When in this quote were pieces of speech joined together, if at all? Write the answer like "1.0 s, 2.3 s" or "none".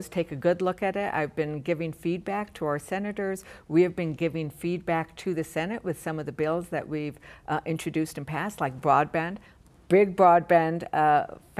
none